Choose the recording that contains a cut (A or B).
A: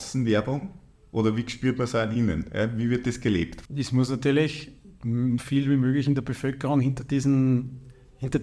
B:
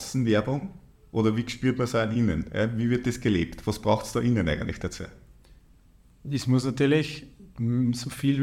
A